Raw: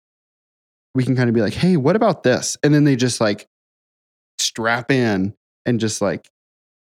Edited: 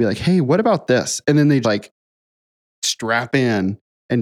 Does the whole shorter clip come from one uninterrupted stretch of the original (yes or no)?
no